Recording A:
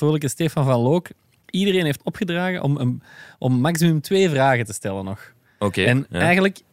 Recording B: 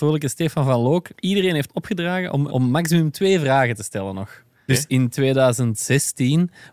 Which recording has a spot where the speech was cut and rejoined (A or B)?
B